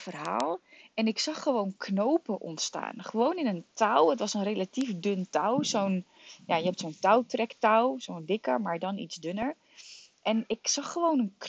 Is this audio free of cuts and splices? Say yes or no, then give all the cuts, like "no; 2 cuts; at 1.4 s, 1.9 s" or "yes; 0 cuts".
yes; 0 cuts